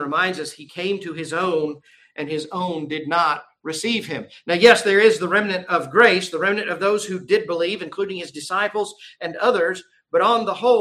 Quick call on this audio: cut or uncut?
uncut